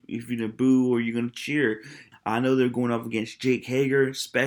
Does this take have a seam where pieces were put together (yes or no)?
yes